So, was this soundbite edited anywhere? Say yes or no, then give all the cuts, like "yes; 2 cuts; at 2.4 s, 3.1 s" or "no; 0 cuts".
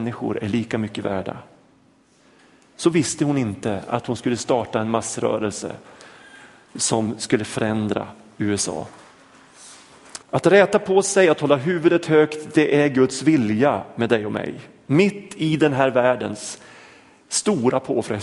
yes; 1 cut; at 10.2 s